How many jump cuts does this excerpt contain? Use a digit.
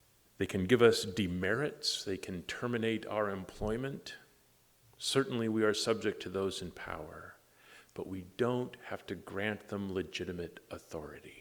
0